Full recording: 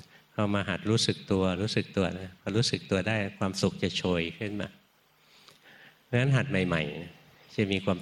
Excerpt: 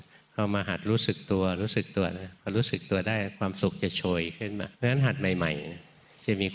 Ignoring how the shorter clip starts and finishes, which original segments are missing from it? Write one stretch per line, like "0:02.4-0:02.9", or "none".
0:04.7-0:06.0

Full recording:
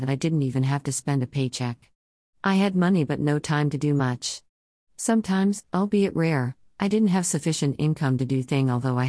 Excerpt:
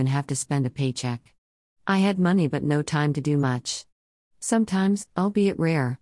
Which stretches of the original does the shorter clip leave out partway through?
none

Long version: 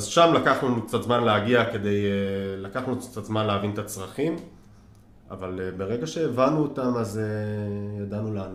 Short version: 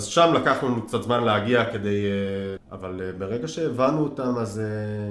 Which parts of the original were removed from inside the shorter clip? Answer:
0:02.6-0:05.2

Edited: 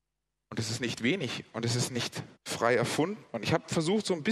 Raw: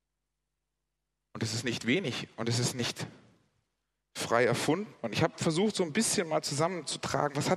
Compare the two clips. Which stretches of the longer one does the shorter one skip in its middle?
0:03.2-0:04.0

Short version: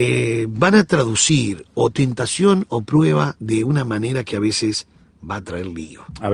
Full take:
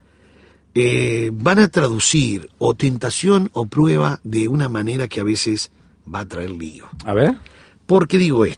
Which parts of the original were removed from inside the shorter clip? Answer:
none

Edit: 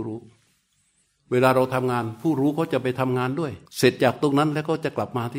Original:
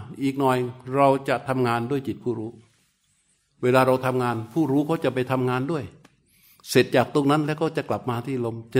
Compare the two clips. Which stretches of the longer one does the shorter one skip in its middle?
0:06.0-0:06.6

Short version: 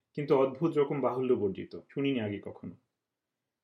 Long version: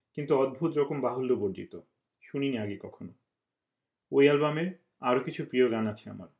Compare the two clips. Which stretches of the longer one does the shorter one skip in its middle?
0:01.9-0:02.3

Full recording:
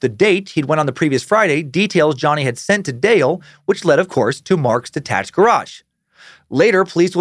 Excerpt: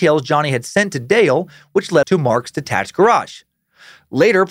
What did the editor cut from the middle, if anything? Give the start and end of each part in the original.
0:04.0-0:04.4

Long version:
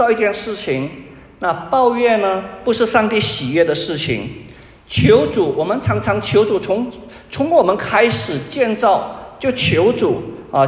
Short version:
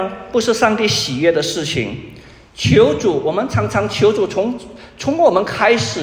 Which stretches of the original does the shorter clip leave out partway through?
none

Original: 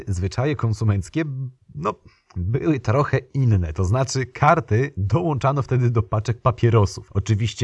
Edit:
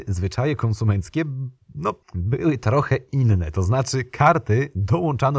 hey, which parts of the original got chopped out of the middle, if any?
0:02.0-0:02.2

